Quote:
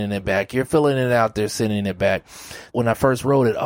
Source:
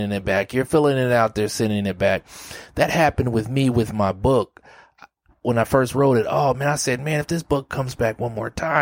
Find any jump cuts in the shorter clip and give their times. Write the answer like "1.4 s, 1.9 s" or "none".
2.7 s